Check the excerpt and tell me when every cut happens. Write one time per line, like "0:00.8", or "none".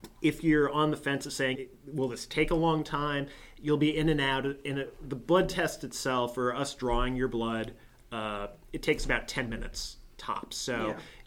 0:01.5